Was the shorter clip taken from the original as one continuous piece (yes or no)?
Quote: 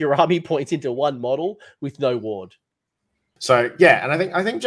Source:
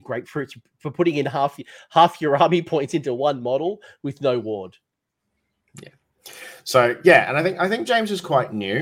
no